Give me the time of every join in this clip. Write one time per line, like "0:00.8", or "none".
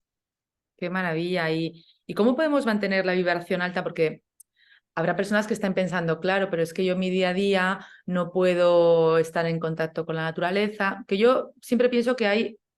none